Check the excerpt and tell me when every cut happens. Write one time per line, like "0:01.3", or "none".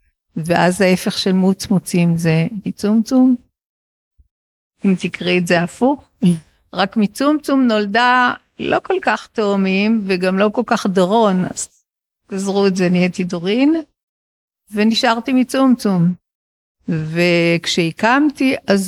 none